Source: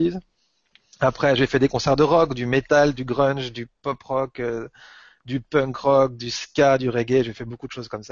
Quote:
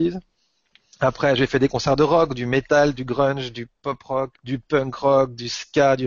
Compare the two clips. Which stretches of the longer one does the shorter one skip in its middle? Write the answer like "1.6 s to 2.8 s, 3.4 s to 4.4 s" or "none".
4.3 s to 5.1 s